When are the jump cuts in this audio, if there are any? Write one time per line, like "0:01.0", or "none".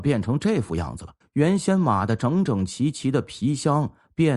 0:01.2